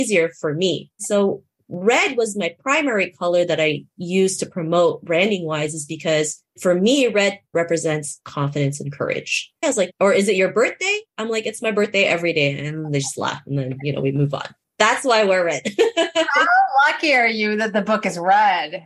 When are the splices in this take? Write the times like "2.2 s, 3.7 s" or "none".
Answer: 9.6 s